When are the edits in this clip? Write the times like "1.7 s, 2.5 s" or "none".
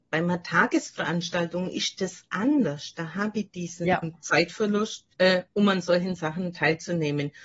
4.0 s, 5.1 s